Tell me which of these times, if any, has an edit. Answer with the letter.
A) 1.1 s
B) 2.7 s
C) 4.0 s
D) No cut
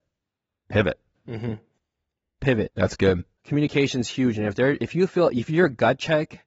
B